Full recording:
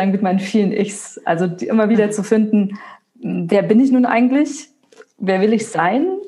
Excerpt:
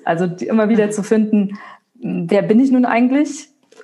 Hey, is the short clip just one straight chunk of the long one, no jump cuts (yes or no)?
yes